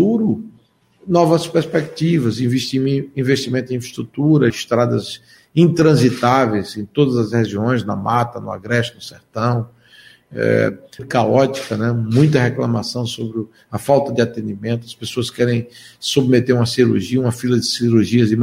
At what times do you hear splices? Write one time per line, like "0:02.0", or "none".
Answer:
0:04.5
0:11.0

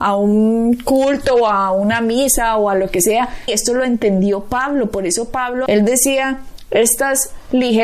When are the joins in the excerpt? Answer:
0:03.5
0:05.7

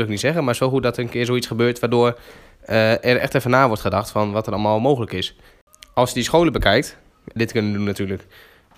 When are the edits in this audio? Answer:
0:07.4

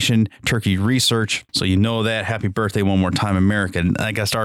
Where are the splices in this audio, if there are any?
0:01.5

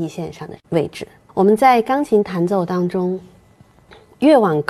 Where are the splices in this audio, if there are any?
0:01.3

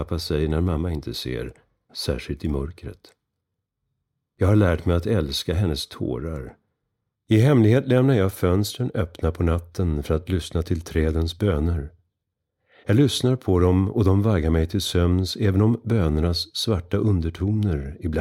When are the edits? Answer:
0:01.9
0:07.1

